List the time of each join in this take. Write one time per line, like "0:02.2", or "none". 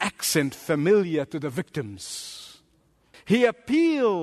0:03.1